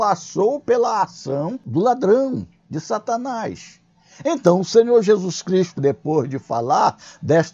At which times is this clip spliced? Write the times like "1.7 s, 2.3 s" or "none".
5.8 s